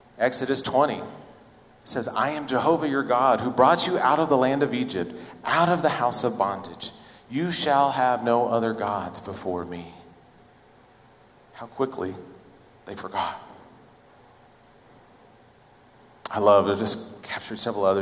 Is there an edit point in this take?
no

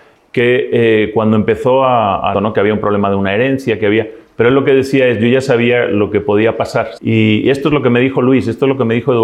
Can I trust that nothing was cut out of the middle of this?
no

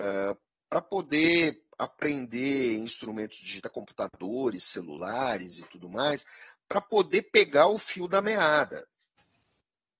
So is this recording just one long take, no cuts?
yes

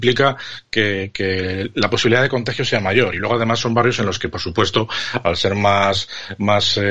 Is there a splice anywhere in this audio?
no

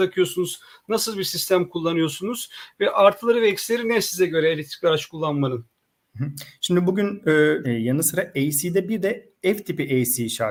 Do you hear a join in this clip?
yes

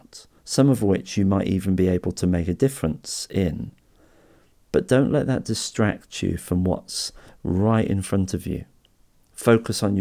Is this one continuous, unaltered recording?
yes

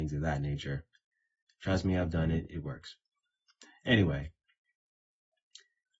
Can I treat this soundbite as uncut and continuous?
yes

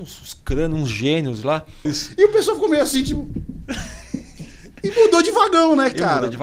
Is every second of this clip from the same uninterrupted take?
no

